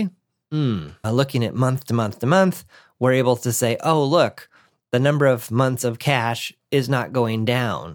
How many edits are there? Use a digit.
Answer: 1